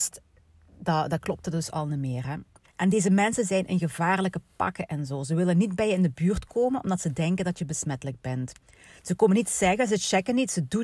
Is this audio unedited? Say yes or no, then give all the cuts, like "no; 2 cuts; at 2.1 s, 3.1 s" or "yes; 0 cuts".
no; 2 cuts; at 2.6 s, 9.0 s